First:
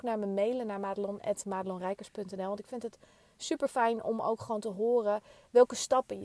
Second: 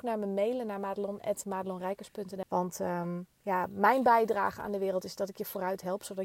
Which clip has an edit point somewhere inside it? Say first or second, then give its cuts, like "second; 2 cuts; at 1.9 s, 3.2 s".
second; 1 cut; at 2.4 s